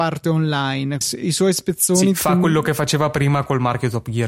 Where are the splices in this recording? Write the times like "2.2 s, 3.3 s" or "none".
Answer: 1.0 s